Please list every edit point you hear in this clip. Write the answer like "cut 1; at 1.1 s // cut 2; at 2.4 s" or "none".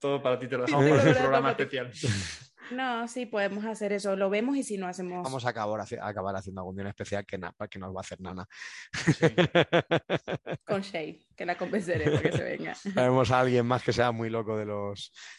cut 1; at 5.2 s